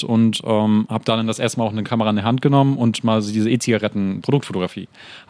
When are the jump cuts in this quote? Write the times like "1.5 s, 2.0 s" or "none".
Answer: 4.2 s